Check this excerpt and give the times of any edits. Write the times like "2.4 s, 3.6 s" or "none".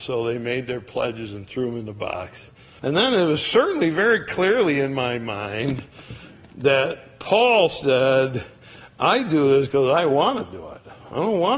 2.8 s